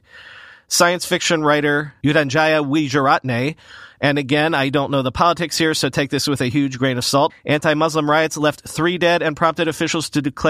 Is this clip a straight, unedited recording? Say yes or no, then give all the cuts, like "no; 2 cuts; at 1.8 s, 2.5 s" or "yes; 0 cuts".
no; 1 cut; at 7.3 s